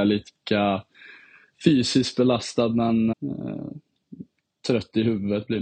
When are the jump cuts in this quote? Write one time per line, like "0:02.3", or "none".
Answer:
0:03.1